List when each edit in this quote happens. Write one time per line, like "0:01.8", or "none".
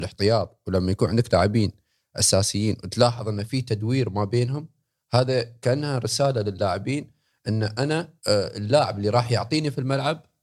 0:08.2